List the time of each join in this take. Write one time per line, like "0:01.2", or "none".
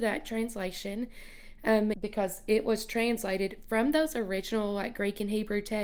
0:01.9

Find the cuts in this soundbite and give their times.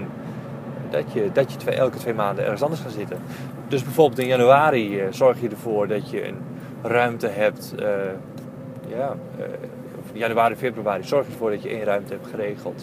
none

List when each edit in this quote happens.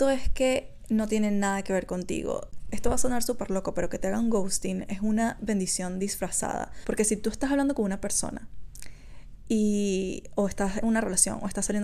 0:06.8

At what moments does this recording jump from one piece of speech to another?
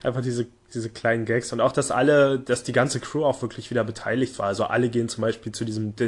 none

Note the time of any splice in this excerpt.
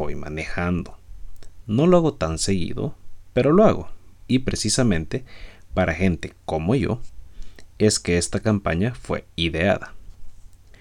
none

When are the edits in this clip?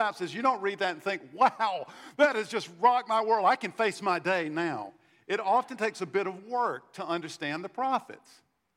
none

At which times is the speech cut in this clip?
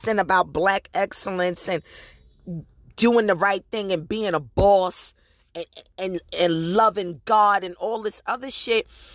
none

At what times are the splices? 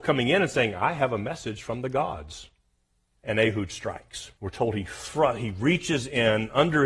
0:03.1
0:04.4

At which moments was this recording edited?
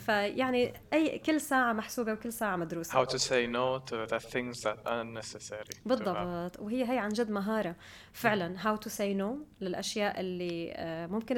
none

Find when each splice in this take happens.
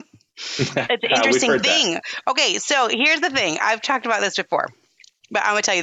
none

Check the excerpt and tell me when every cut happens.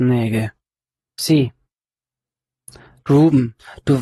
0:01.0

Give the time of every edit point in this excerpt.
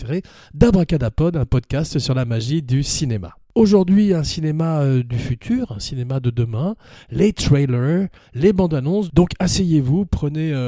none

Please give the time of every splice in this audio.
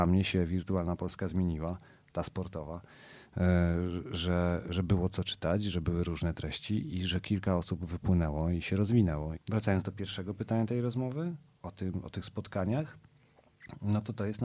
0:09.3

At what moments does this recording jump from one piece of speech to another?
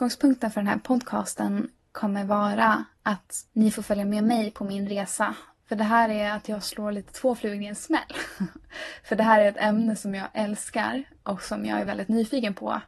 0:11.9

